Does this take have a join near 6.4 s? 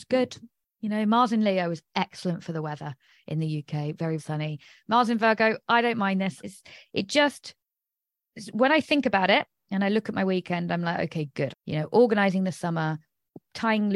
yes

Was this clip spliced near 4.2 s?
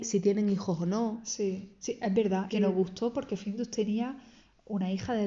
no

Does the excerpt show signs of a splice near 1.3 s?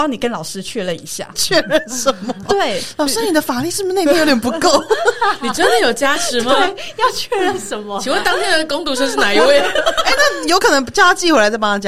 yes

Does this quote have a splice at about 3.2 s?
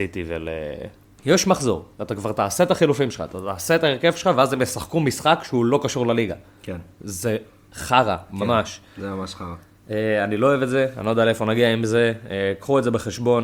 no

